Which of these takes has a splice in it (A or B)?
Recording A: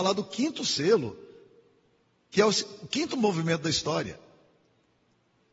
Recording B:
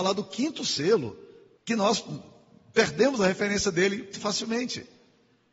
B